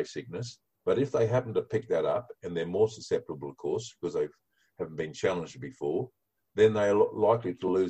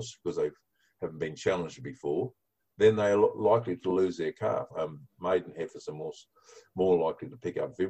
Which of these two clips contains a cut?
second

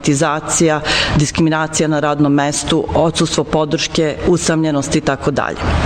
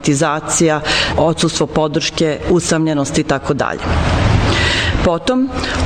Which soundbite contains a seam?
second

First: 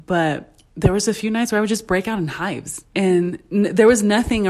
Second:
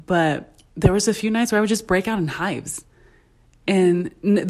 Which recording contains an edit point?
first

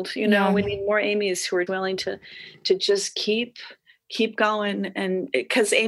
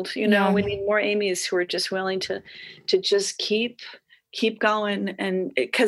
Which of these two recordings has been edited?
first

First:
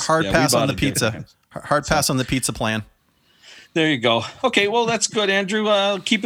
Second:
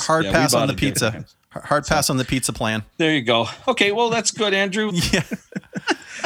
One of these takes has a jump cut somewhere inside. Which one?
second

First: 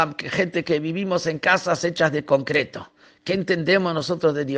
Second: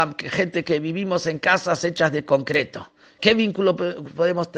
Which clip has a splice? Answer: second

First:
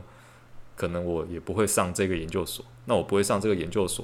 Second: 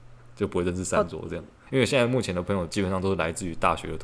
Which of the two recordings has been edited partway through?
second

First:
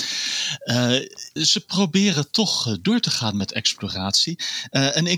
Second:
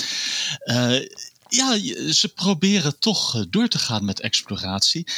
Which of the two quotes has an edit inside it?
first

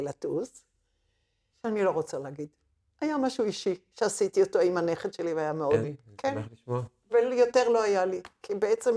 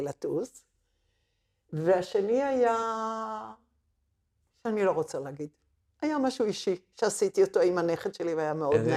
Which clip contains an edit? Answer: first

